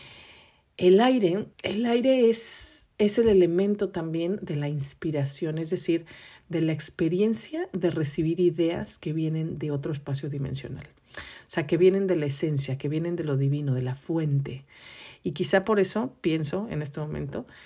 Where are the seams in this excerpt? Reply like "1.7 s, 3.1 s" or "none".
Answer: 1.5 s